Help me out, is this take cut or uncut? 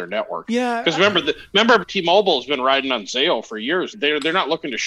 cut